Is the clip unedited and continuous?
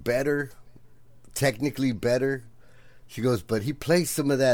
yes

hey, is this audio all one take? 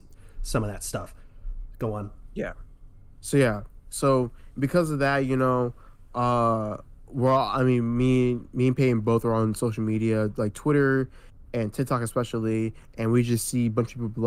yes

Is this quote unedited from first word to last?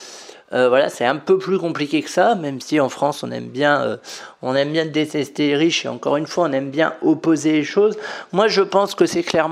yes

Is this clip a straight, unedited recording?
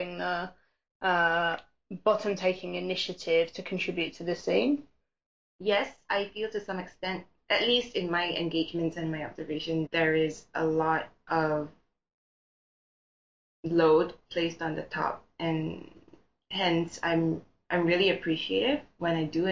no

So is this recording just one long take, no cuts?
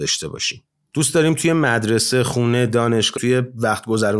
no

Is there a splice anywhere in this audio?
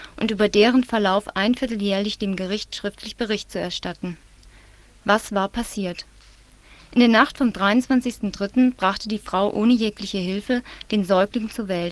no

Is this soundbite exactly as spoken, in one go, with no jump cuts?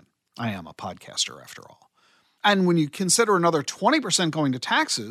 no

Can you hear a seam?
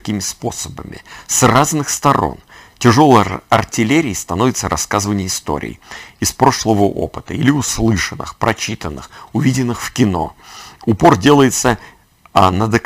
no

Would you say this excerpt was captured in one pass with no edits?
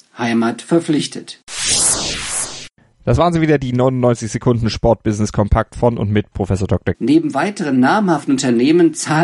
no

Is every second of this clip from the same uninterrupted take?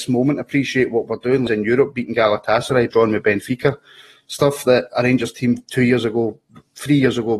no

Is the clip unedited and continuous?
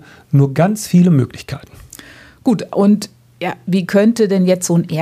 yes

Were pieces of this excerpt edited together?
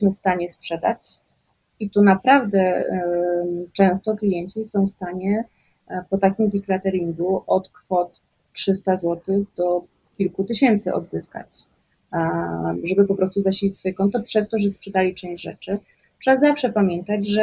no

